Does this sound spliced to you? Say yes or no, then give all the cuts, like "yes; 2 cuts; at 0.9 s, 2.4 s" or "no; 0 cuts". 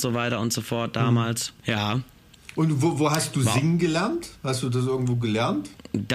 no; 0 cuts